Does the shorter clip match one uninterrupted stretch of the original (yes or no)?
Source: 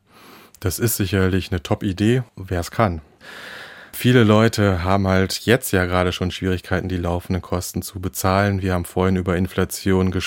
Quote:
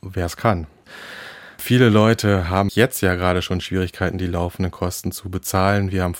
no